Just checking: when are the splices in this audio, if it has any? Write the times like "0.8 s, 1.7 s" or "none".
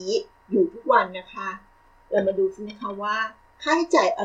none